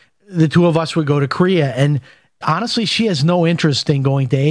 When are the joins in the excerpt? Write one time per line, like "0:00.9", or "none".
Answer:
0:02.4